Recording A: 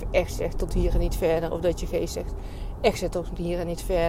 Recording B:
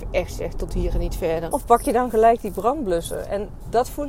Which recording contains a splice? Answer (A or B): B